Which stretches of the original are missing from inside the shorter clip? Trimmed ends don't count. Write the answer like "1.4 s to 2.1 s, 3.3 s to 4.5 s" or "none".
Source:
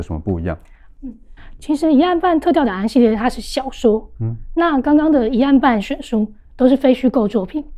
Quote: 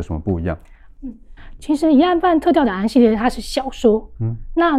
none